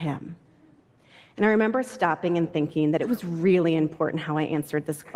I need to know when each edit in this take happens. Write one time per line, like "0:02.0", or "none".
none